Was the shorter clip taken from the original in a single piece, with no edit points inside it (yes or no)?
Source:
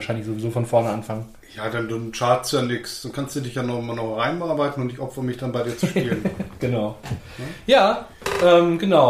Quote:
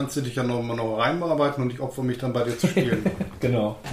yes